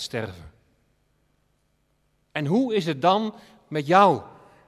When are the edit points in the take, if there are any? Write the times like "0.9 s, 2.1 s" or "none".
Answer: none